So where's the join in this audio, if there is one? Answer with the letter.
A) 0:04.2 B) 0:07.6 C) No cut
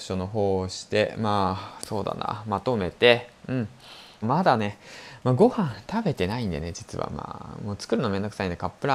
A